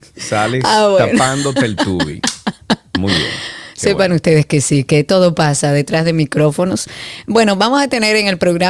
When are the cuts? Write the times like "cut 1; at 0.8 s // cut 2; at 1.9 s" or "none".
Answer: none